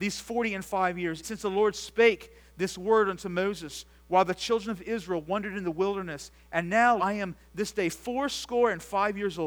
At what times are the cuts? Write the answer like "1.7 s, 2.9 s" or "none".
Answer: 1.2 s, 7.0 s